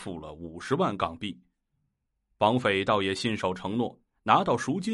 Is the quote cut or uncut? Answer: uncut